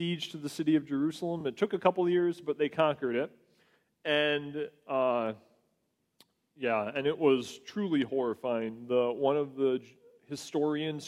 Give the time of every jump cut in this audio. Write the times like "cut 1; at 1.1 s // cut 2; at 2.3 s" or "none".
none